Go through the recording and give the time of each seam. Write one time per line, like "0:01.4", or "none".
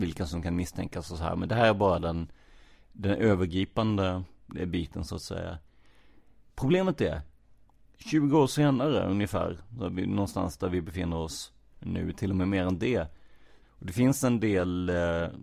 0:13.6